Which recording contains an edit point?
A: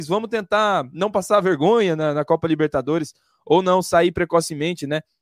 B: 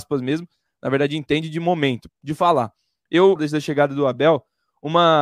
B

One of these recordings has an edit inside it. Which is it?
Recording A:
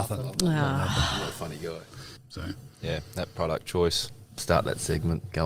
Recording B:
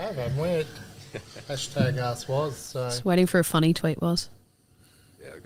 A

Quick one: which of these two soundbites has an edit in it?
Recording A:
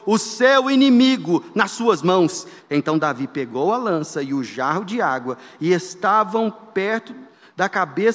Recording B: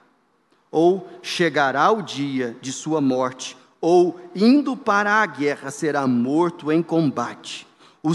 A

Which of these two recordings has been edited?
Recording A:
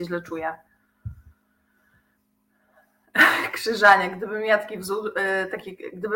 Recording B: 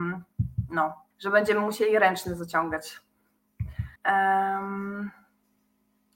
B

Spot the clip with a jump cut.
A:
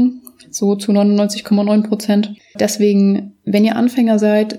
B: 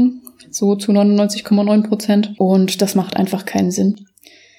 A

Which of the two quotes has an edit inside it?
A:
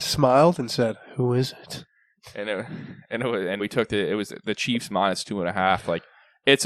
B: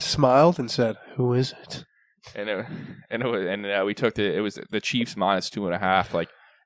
A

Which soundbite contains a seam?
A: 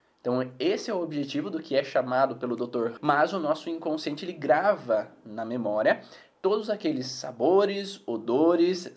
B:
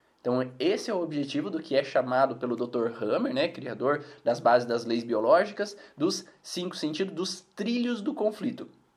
A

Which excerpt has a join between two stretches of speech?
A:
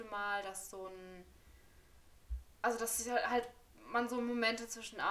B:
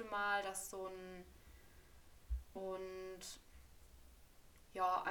B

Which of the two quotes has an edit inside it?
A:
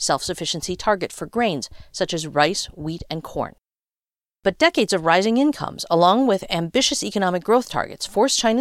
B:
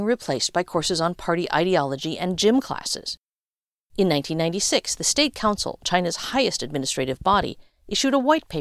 B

